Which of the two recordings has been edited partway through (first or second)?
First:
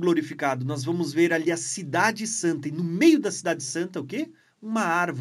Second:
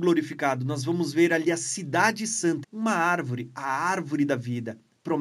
second